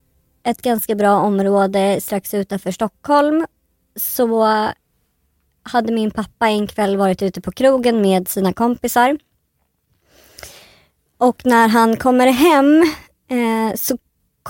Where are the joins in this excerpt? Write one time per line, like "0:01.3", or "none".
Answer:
none